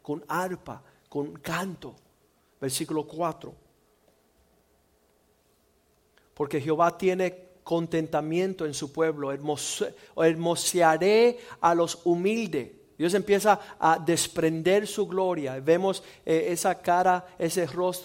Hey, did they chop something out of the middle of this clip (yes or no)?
no